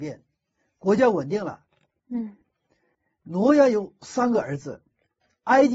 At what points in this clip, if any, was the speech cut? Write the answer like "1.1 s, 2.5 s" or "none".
2.0 s